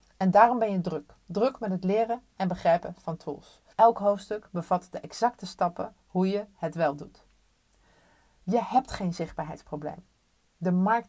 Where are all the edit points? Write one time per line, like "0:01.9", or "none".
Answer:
0:03.7